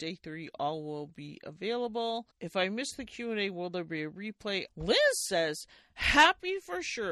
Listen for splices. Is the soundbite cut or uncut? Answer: cut